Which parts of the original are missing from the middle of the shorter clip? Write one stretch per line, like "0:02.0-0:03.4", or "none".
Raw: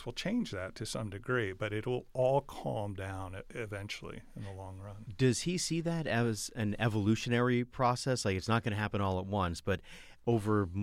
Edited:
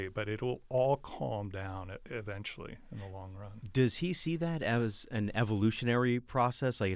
none